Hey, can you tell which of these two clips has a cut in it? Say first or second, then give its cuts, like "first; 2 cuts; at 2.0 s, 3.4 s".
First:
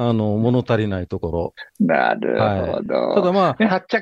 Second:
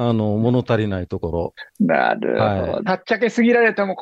second; 1 cut; at 2.9 s